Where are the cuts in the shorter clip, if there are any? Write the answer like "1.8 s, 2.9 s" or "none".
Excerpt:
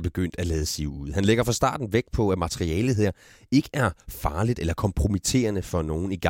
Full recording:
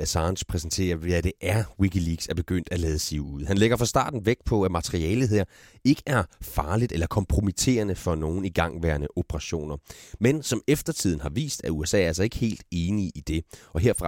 none